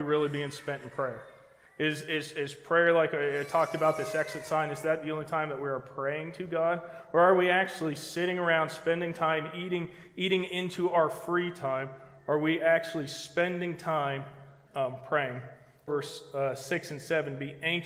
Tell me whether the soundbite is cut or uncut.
cut